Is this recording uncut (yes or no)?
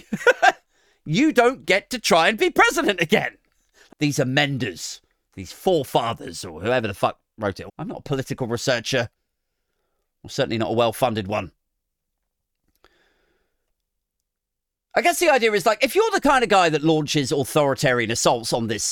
no